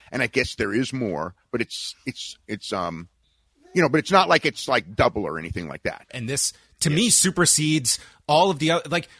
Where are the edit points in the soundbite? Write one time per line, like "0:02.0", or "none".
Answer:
0:06.1